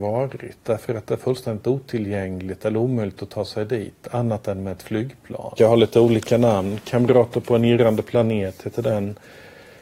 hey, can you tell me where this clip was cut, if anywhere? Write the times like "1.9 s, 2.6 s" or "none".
5.6 s

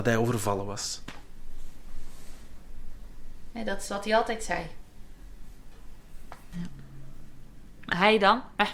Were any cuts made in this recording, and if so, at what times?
3.5 s, 6.5 s

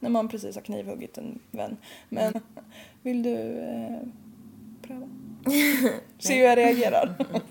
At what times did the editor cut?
2.3 s

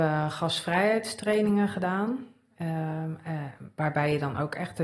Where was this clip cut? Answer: none

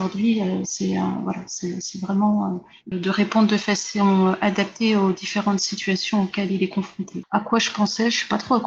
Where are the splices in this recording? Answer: 2.9 s, 7.2 s

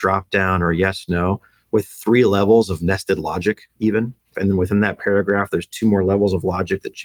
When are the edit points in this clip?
4.3 s

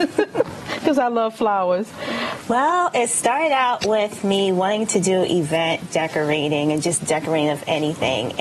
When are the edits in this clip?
2.4 s

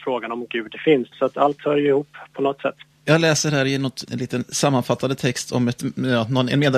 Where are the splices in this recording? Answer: 1.1 s, 2.9 s, 4.0 s

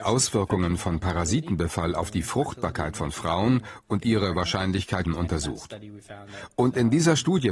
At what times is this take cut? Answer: 5.0 s

